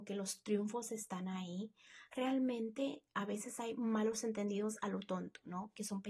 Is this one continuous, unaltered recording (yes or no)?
yes